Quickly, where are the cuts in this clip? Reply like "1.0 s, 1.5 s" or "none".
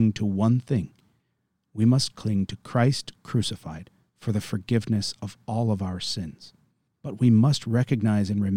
6.9 s